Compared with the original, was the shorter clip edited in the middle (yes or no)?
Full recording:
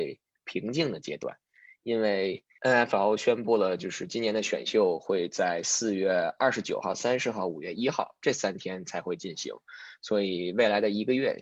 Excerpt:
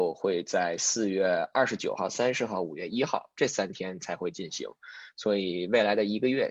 no